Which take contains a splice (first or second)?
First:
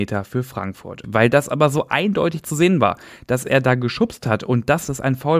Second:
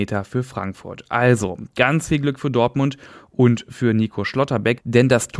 first